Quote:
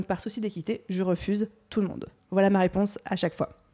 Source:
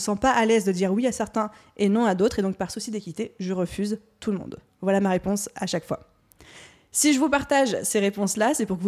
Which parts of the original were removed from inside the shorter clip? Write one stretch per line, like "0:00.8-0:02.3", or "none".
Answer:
none